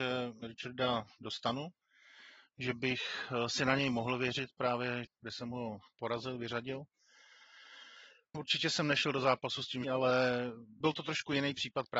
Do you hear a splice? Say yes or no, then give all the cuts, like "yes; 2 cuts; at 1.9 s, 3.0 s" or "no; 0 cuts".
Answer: yes; 2 cuts; at 5.0 s, 9.8 s